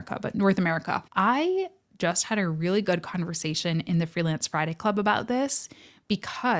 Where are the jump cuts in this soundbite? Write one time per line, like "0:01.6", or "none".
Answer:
0:01.1